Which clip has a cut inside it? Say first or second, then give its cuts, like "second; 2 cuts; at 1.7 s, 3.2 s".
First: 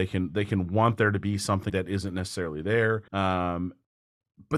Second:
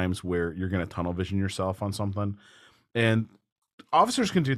first; 2 cuts; at 1.7 s, 3.1 s